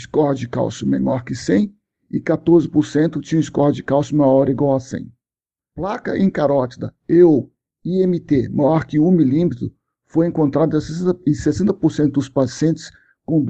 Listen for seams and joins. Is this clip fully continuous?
no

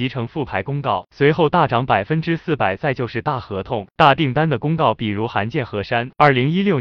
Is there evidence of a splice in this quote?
no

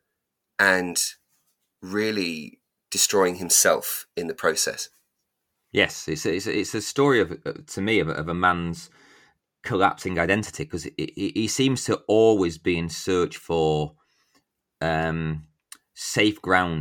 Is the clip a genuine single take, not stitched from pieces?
yes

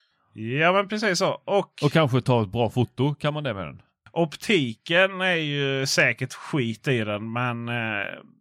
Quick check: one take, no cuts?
yes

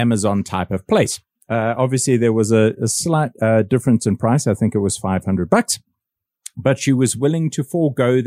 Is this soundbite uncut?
yes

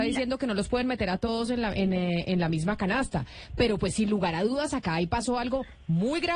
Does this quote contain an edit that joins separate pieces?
no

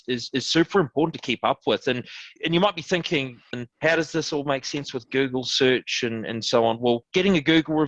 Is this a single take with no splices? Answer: no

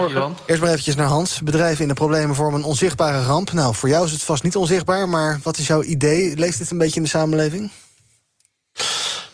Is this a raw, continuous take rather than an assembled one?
yes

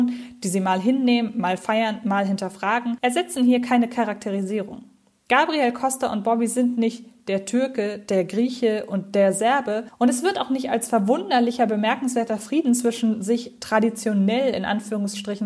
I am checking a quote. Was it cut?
no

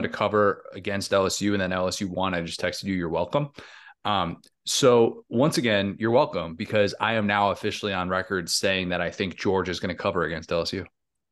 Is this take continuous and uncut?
yes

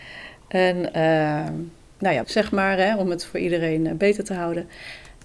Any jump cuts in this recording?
yes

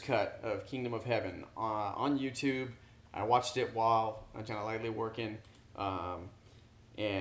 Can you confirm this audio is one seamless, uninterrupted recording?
no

